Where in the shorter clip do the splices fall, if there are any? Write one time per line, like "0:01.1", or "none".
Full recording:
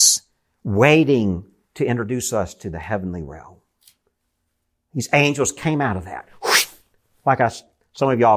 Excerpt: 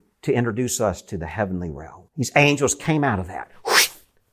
0:02.1